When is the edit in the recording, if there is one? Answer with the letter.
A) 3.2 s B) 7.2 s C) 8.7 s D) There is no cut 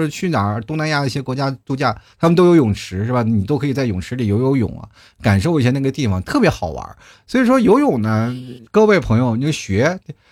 C